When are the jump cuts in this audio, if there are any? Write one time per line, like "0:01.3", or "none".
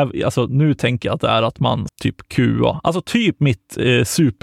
0:01.9

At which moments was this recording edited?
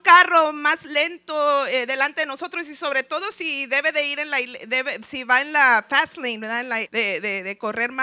0:06.8

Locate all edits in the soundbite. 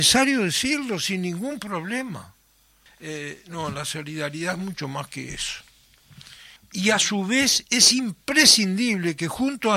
0:02.9
0:06.6

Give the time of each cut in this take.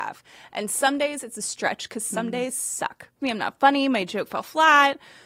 0:03.2

